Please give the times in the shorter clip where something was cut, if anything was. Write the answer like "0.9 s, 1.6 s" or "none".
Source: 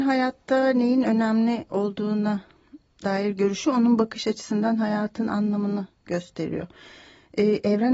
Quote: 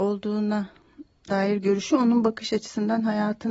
none